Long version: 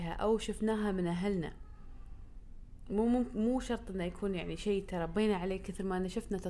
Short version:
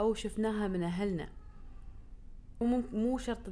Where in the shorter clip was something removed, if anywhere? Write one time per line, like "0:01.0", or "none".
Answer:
0:02.6